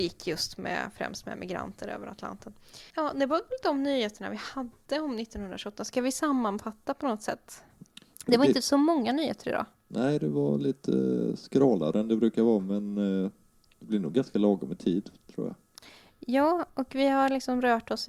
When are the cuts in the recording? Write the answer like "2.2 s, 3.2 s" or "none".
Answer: 2.9 s, 7.8 s